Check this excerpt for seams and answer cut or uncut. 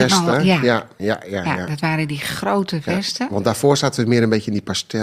uncut